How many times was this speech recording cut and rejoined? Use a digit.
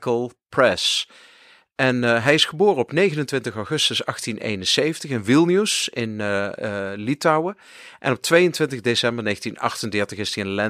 0